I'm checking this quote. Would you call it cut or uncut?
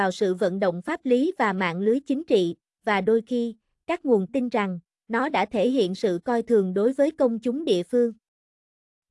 cut